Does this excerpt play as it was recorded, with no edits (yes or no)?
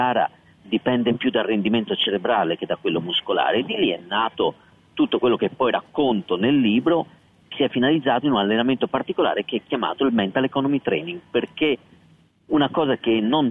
no